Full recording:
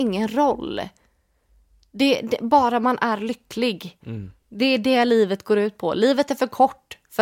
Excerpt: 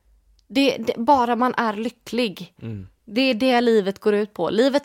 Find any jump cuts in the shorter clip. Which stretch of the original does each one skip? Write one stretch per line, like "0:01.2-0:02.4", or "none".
none